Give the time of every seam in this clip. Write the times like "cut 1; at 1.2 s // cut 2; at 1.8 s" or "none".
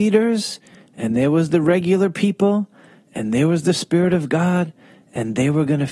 none

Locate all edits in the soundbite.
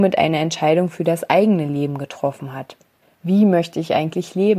cut 1; at 3.1 s

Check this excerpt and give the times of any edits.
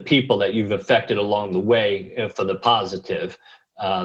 none

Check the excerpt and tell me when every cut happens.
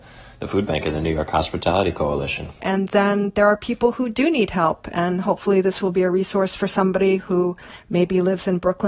cut 1; at 2.6 s

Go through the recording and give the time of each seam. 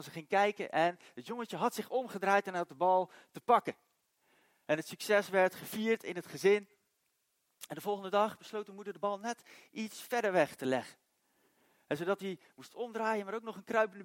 none

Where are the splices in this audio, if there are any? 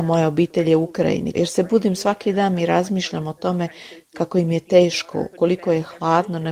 cut 1; at 1.3 s // cut 2; at 5.3 s

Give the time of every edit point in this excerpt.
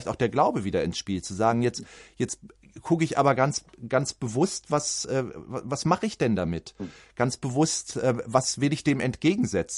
none

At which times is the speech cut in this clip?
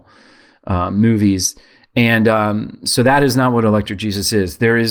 none

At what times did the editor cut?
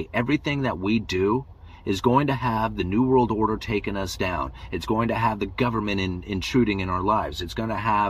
none

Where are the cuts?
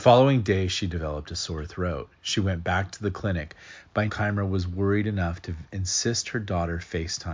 cut 1; at 4.1 s

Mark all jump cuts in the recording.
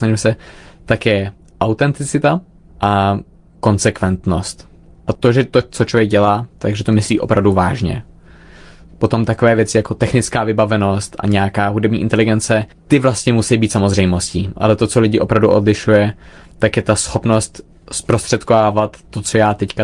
none

